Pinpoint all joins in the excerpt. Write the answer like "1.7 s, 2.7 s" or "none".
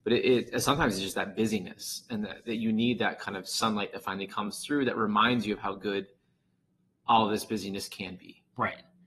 none

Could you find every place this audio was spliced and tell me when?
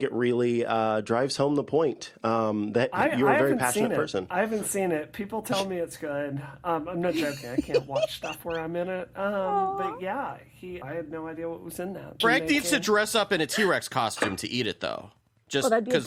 10.8 s, 12.2 s

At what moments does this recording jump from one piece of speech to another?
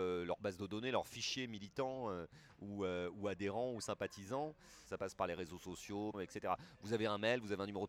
4.9 s, 6.1 s

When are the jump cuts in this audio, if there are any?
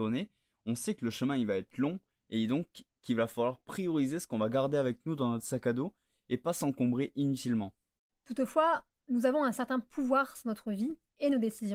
8.1 s

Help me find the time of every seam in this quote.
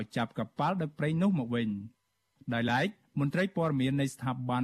none

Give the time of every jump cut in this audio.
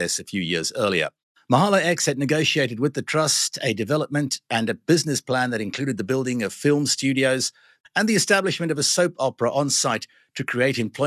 7.8 s

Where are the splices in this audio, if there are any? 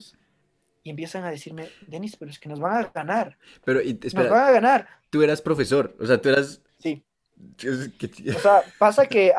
none

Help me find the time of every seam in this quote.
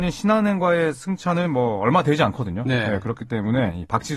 none

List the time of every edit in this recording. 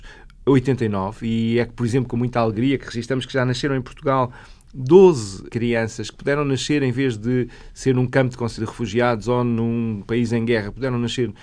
5.5 s, 8.6 s

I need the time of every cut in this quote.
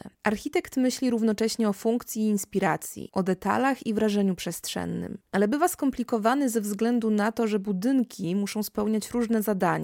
3.1 s, 5.2 s

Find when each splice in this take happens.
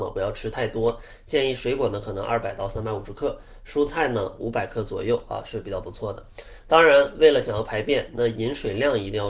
none

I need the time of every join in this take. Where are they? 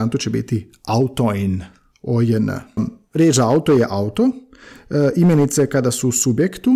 2.8 s

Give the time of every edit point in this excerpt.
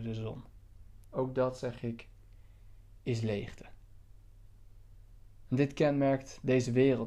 1.0 s

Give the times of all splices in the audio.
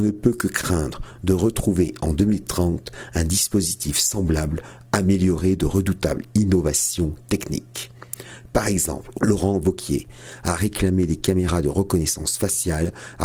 9.1 s

